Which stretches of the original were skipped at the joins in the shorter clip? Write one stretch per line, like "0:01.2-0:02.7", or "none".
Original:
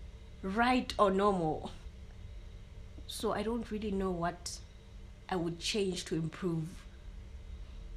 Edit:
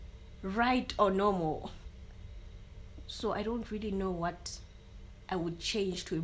none